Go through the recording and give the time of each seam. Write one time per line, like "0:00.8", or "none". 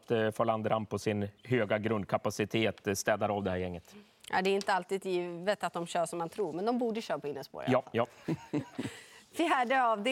none